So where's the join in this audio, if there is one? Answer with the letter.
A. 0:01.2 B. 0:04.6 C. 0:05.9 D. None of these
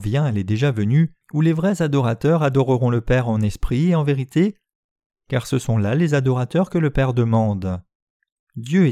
A